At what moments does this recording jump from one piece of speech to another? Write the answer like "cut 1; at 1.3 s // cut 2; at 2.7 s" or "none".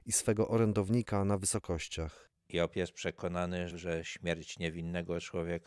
cut 1; at 3.7 s